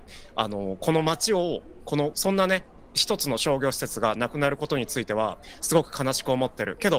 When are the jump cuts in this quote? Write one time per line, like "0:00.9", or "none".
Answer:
0:02.1